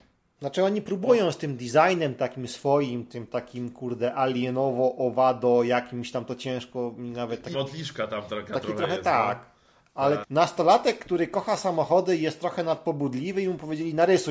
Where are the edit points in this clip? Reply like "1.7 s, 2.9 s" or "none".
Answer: 7.5 s, 10.2 s